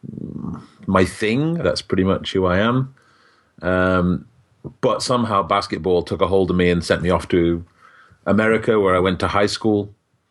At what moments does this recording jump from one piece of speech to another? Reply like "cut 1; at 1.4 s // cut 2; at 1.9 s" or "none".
cut 1; at 1.6 s